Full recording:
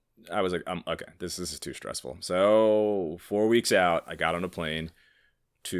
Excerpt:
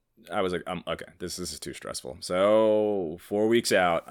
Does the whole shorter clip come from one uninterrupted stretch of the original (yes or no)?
yes